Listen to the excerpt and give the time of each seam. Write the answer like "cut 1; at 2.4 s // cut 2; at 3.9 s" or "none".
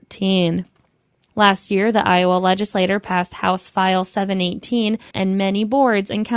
cut 1; at 1.3 s // cut 2; at 5.1 s